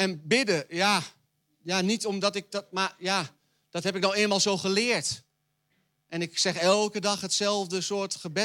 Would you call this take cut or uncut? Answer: uncut